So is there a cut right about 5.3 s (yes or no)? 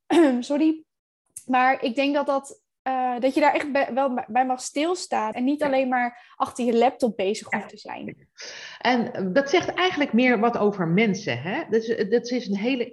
yes